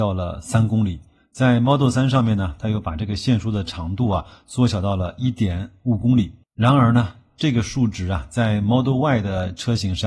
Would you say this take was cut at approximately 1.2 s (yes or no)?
no